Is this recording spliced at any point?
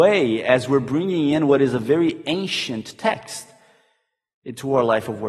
no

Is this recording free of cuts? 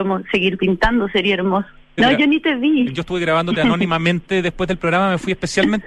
no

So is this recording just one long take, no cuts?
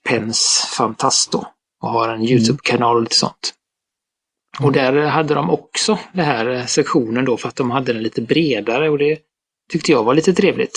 yes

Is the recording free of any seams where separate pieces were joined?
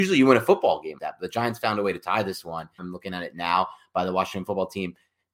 no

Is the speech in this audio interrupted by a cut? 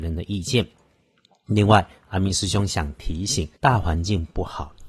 yes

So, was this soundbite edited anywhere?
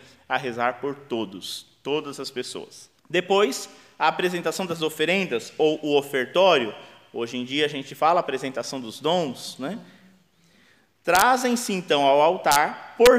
yes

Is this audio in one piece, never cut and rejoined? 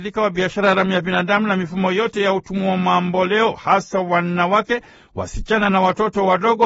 yes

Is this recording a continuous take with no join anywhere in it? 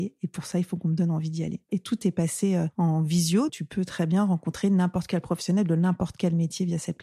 no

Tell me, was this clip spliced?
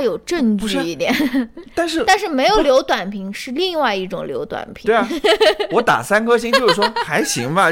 no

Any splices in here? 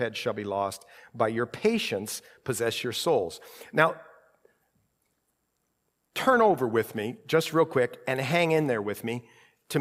no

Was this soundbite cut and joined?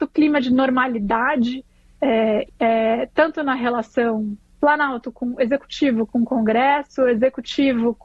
yes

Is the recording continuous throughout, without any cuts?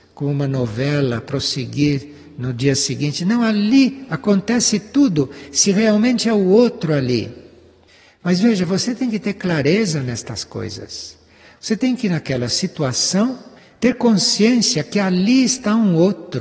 yes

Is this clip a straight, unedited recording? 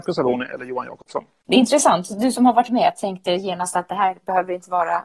yes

